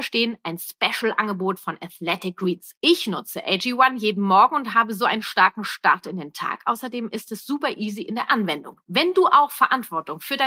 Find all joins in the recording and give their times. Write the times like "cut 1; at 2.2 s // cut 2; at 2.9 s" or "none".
cut 1; at 2.8 s // cut 2; at 8.8 s